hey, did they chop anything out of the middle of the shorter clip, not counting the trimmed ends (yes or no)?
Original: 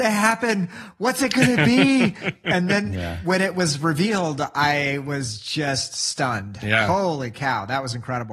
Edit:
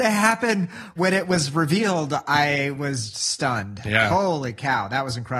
yes